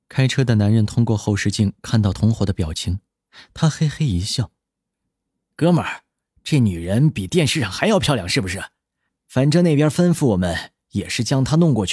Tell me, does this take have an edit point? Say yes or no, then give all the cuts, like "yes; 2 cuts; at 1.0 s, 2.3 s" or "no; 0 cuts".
no; 0 cuts